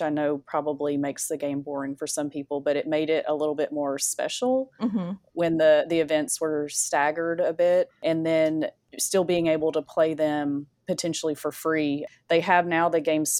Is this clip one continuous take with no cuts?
yes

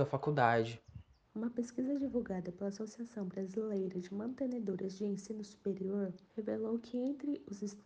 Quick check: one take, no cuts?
no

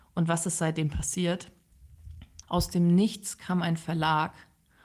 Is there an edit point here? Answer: yes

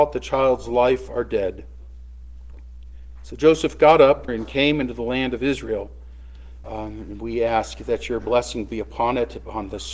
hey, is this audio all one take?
no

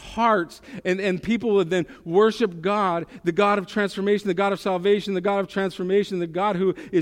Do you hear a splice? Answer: no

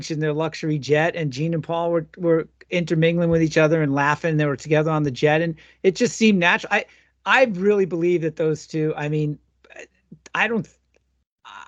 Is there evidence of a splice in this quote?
no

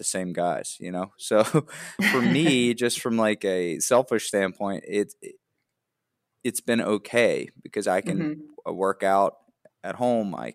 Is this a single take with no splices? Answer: no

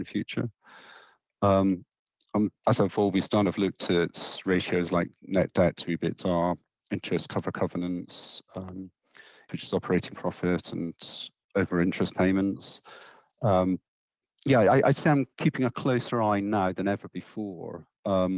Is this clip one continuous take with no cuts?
no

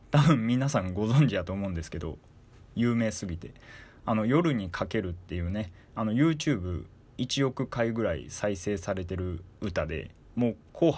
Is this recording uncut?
no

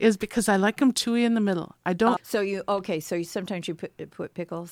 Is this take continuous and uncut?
no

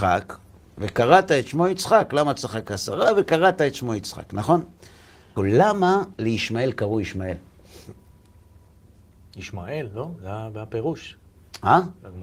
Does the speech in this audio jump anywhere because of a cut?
yes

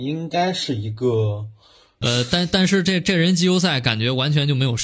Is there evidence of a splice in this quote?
yes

